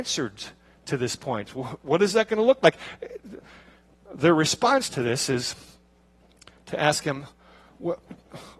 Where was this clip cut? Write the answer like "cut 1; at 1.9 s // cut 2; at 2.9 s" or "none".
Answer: none